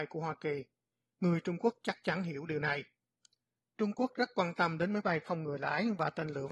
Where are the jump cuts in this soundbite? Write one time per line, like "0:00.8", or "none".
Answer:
none